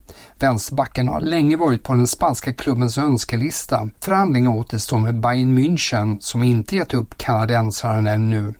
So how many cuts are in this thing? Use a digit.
1